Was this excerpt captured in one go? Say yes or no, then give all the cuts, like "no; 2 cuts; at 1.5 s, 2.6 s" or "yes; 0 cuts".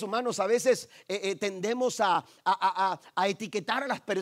yes; 0 cuts